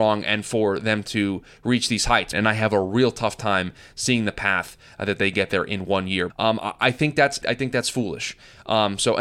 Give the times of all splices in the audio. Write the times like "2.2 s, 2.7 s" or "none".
2.3 s, 6.3 s, 7.4 s